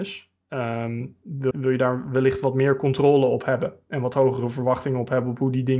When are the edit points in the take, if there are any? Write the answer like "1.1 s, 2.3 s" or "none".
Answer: 1.5 s